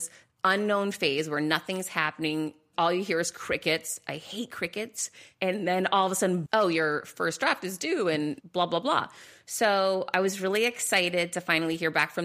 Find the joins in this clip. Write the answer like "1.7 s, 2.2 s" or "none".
6.5 s